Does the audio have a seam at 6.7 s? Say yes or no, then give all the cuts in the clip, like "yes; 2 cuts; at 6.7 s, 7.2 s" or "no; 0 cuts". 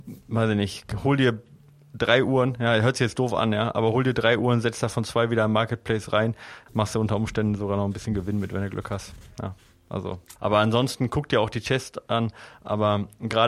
yes; 2 cuts; at 6.7 s, 10.4 s